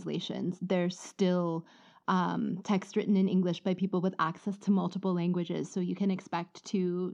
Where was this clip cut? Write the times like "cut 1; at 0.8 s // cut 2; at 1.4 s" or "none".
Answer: none